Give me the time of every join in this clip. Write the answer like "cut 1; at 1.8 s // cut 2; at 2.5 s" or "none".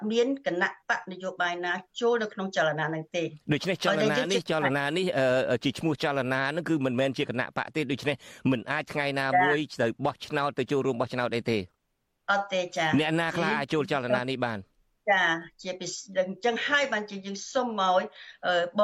none